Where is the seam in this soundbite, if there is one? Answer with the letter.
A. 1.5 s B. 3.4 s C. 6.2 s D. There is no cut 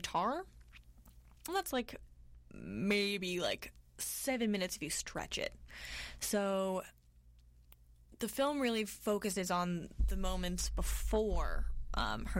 A